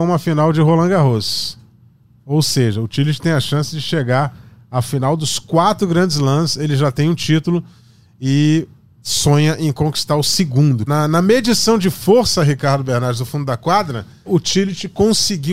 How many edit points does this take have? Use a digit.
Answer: 2